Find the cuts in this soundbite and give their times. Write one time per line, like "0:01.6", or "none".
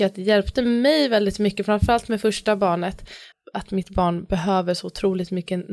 0:03.3